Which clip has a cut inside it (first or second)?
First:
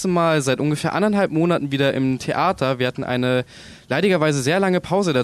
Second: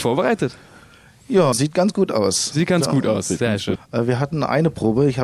second